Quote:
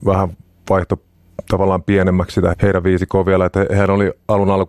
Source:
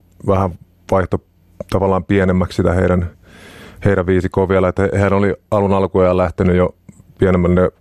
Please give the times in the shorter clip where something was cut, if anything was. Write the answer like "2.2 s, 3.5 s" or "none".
2.5 s